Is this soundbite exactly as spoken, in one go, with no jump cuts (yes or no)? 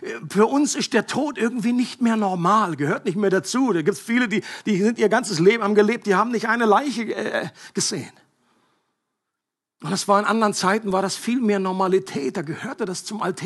yes